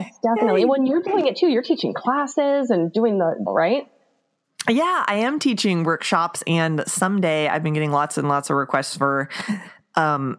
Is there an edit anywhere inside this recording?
yes; 1 cut; at 3.5 s

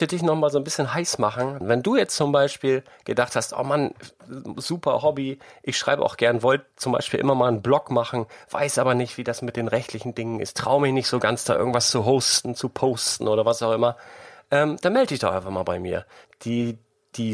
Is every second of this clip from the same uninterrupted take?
no; 2 cuts; at 1.6 s, 16.2 s

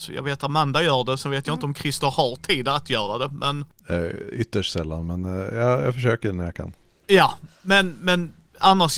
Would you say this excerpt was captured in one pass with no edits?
yes; 0 cuts

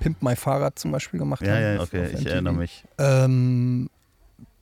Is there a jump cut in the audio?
yes; 2 cuts; at 1.7 s, 2.8 s

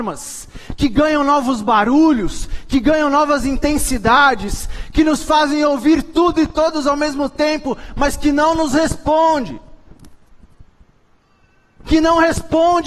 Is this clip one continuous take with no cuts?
yes; 0 cuts

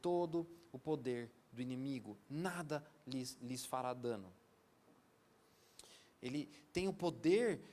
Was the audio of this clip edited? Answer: yes; 1 cut; at 6.1 s

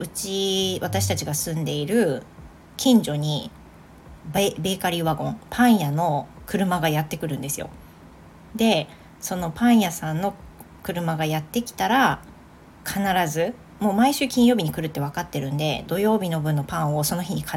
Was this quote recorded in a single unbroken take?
yes; 0 cuts

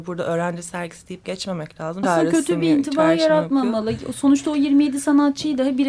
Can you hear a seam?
yes; 1 cut; at 2.0 s

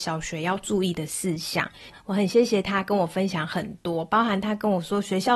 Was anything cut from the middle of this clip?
no; 0 cuts

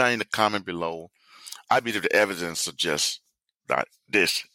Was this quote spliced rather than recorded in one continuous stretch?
yes; 1 cut; at 1.6 s

